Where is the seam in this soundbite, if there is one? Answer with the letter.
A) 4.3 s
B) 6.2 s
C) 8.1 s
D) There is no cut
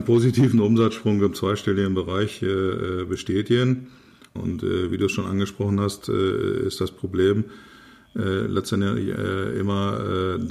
A